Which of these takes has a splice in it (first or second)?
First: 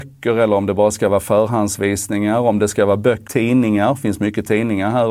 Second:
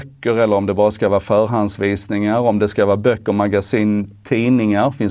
first